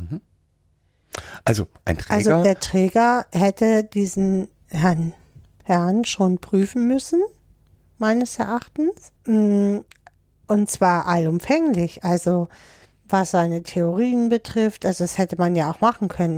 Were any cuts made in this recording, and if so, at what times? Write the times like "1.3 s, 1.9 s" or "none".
9.2 s